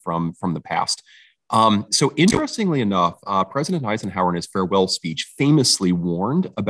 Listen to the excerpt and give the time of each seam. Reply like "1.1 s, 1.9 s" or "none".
none

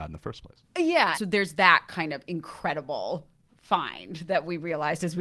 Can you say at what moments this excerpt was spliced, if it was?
1.1 s

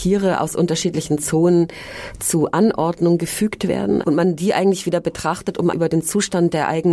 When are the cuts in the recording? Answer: 4.0 s, 5.7 s

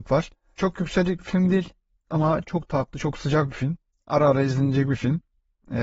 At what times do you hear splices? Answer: none

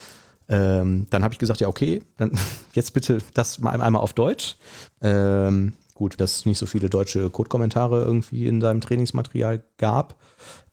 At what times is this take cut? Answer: 4.9 s, 6.2 s

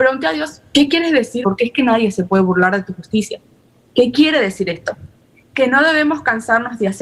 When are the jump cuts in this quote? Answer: 1.4 s

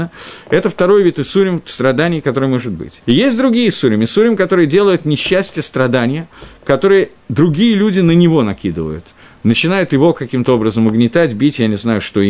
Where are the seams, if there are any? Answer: 3.0 s

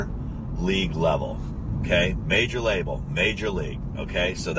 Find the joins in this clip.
none

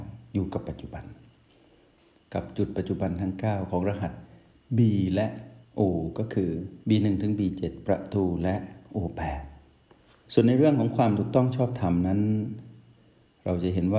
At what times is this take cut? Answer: 6.8 s

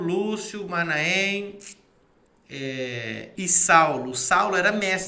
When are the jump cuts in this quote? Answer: 3.4 s

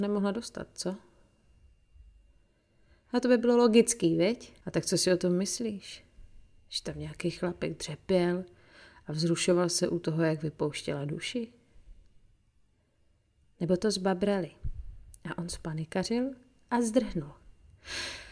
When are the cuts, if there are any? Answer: 4.6 s

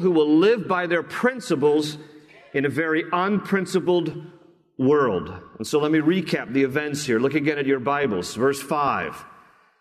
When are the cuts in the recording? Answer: none

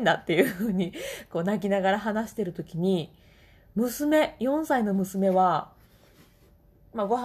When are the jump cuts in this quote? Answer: none

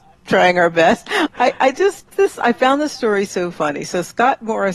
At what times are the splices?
1.3 s

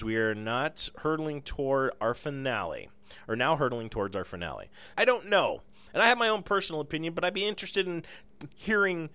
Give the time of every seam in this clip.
4.9 s

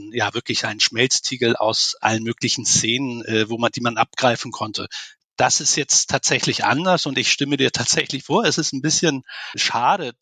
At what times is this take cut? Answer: none

